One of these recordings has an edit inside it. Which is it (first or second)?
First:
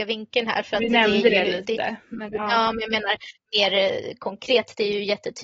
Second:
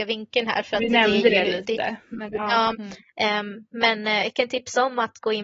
second